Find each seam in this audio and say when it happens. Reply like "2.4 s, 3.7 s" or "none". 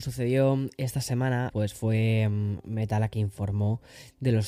1.5 s